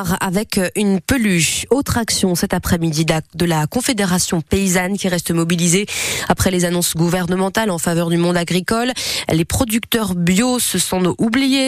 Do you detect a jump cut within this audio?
no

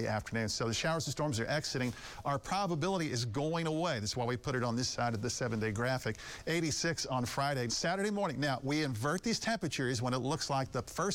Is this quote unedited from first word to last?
no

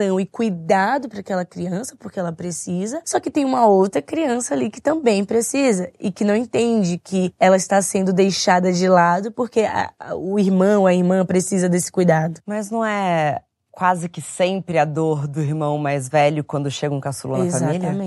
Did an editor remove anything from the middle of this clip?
no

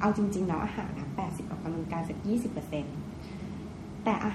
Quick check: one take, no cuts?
no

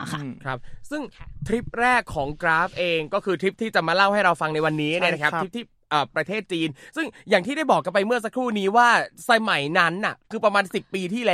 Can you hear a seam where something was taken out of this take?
yes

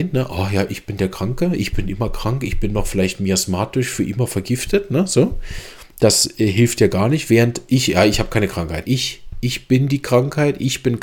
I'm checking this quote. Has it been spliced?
yes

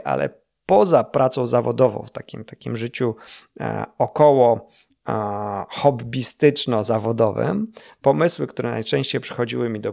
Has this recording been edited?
no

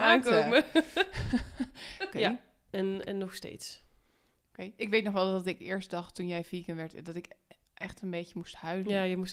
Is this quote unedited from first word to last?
no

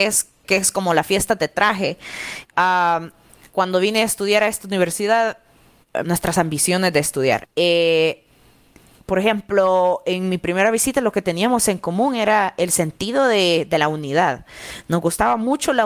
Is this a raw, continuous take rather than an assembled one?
no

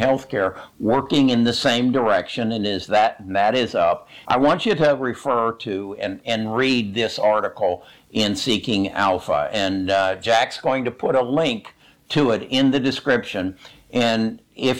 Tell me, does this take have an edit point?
yes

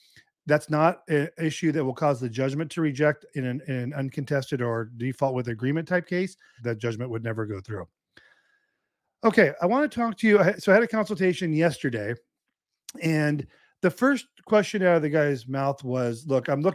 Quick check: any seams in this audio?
yes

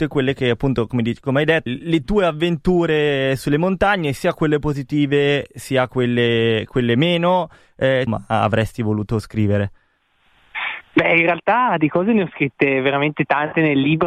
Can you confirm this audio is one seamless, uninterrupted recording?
no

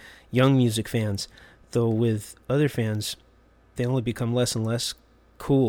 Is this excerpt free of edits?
yes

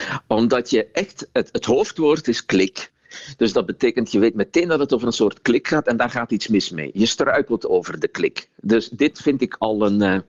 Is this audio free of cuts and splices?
yes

